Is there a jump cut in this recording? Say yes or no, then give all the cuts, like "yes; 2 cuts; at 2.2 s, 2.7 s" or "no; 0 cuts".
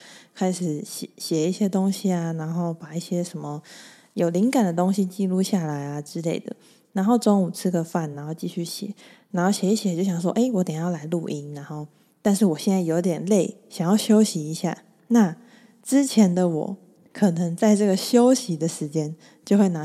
no; 0 cuts